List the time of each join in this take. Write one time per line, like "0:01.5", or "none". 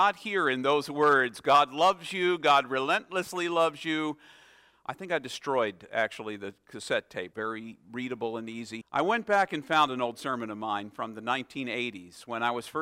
0:07.3
0:08.8